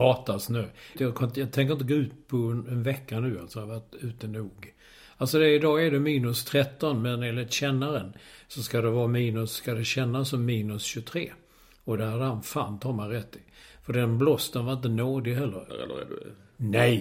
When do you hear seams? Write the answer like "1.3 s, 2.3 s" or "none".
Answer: 0.9 s, 15.7 s